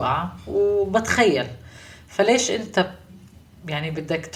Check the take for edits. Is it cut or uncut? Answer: uncut